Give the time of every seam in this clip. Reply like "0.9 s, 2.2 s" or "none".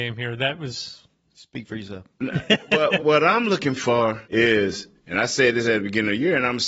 3.0 s, 4.2 s